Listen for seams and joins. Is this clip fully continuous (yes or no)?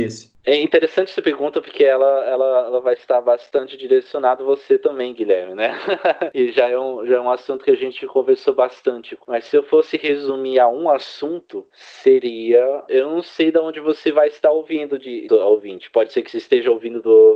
no